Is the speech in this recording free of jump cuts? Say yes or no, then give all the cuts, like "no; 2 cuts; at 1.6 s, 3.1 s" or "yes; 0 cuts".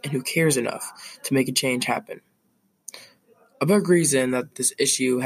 yes; 0 cuts